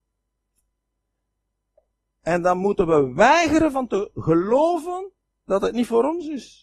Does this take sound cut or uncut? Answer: uncut